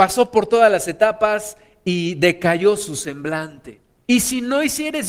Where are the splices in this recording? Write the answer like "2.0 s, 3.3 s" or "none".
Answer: 4.0 s